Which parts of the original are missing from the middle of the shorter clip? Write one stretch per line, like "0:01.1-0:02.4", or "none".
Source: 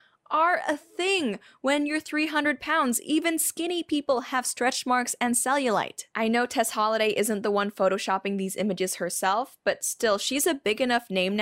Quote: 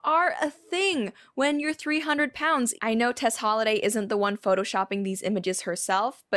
0:03.0-0:06.1

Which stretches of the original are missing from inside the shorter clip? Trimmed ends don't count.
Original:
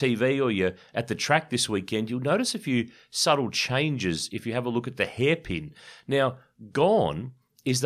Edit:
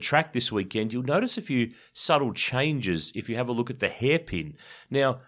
none

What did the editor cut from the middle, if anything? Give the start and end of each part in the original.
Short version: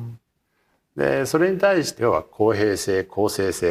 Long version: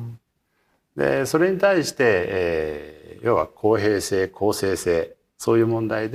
0:02.0-0:03.2

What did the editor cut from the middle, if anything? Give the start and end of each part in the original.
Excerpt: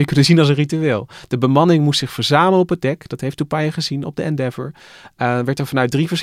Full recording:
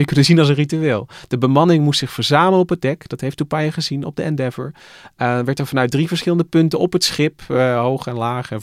none

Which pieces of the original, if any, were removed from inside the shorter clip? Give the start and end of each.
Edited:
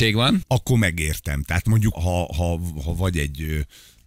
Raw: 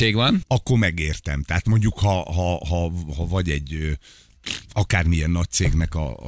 0:01.9-0:02.3

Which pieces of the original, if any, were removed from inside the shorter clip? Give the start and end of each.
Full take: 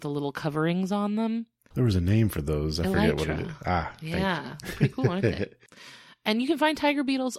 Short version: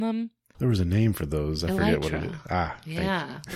none

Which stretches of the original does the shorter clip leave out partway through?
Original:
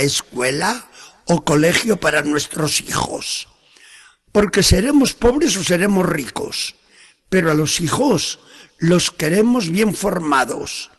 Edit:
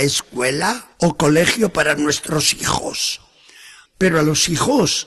0:00.9-0:01.2
0:04.1-0:07.2

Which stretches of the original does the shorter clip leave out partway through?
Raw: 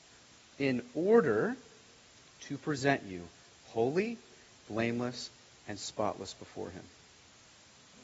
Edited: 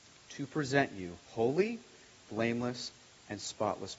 0:03.4-0:03.6

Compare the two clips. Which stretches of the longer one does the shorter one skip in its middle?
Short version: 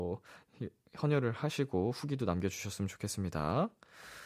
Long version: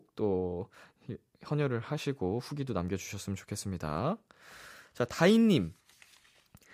none

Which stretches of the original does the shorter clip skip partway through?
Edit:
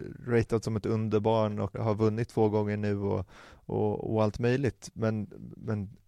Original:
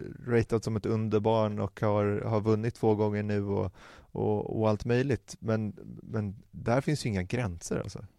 0:01.7-0:02.2

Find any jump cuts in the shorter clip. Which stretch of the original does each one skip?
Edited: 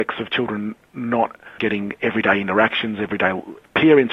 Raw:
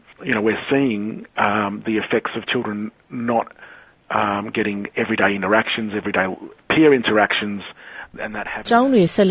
0:03.7-0:04.5

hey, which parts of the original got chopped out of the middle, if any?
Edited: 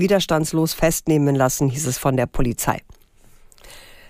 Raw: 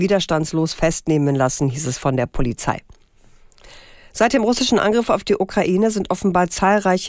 none

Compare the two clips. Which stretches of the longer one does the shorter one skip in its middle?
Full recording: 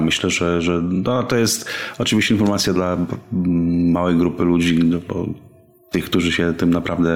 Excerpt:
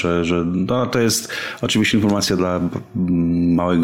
none

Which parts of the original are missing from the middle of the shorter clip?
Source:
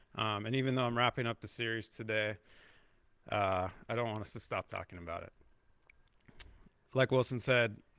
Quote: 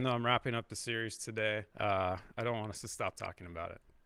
0:02.4-0:03.2

